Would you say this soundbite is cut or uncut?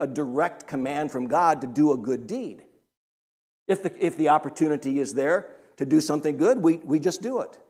uncut